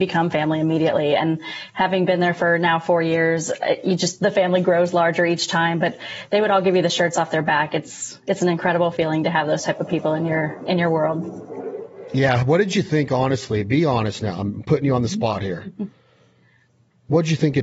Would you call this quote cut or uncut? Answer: uncut